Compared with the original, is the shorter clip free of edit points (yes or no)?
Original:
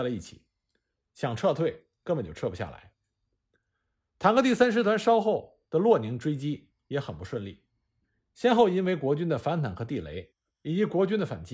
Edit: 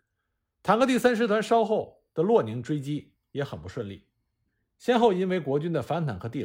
yes